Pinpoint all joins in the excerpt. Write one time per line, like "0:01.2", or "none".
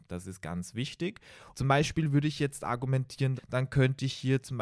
0:01.5
0:03.4